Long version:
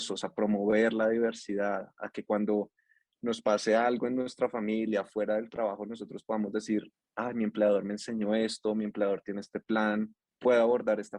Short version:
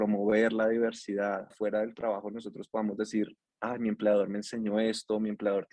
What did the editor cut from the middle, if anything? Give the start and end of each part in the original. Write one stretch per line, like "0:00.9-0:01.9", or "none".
0:01.9-0:05.1